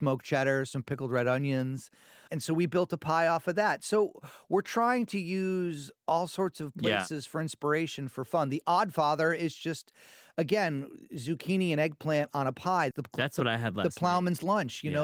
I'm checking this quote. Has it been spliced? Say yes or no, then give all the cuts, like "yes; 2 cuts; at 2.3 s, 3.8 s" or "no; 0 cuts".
yes; 2 cuts; at 2.3 s, 12.9 s